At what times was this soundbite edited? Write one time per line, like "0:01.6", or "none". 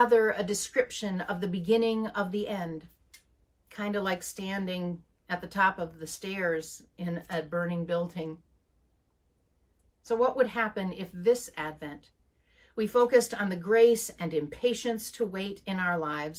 none